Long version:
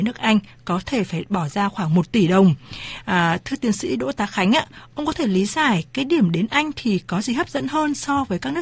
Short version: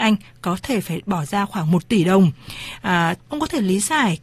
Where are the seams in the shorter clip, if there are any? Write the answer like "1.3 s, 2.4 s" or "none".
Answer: 3.2 s